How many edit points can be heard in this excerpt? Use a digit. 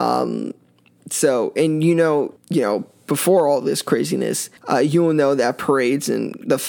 2